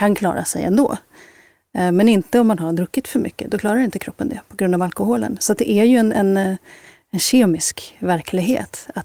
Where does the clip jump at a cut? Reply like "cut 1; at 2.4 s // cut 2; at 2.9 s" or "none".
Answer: cut 1; at 3.5 s